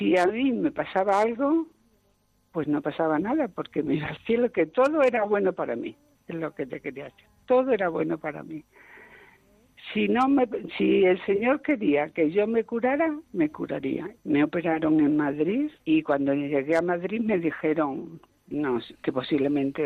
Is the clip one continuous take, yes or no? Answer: no